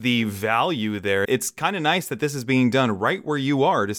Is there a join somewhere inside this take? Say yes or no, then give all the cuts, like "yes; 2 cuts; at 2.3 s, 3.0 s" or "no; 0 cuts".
yes; 1 cut; at 1.2 s